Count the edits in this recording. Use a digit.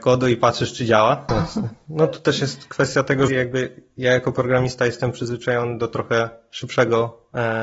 2